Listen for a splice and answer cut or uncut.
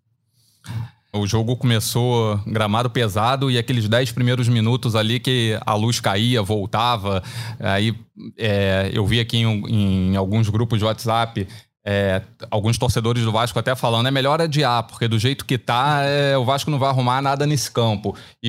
cut